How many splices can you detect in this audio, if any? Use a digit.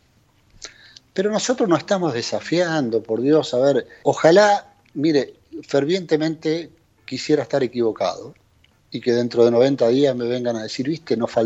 1